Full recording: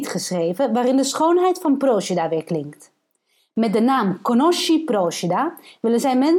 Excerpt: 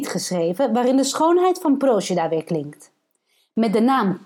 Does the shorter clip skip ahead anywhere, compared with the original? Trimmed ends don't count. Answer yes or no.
no